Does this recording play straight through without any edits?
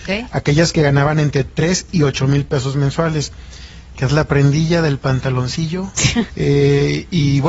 no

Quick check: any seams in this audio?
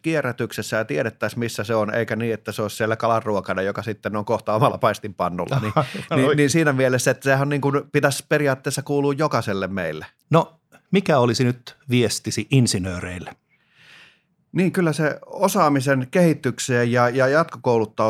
yes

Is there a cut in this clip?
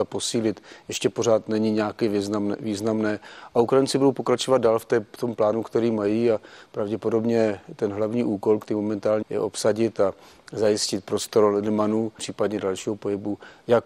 yes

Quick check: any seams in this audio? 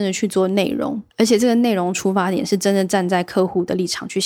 yes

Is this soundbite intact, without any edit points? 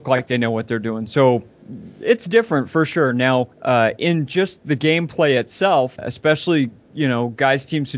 no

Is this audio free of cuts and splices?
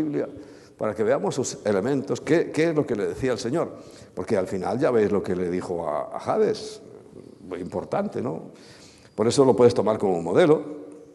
yes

